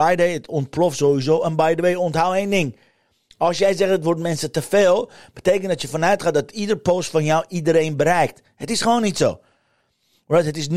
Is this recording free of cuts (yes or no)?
yes